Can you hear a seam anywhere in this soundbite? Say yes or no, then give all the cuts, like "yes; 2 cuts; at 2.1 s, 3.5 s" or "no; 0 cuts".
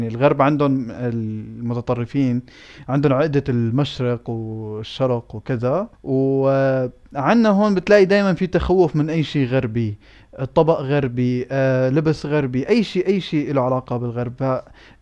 yes; 1 cut; at 5.9 s